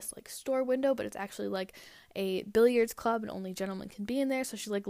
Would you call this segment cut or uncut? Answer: uncut